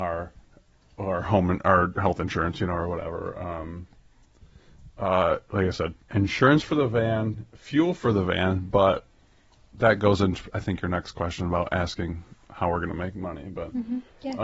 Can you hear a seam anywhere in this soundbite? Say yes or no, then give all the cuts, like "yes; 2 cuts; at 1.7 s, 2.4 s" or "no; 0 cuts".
yes; 1 cut; at 6.0 s